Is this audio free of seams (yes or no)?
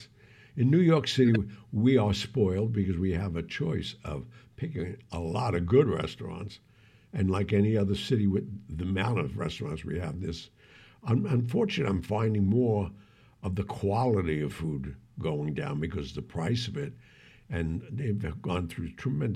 yes